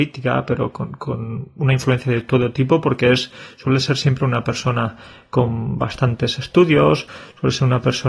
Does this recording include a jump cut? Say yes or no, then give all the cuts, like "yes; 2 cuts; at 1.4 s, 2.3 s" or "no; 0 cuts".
no; 0 cuts